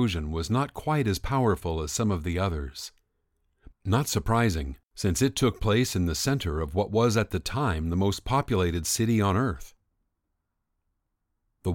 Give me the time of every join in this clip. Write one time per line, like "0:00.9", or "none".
0:03.7
0:04.8